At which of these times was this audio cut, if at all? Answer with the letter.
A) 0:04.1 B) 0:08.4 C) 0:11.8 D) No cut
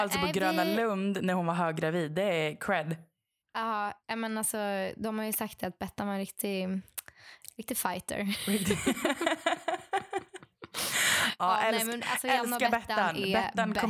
D